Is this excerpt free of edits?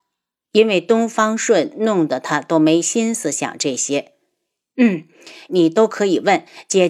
no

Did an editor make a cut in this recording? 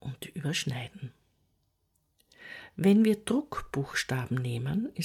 no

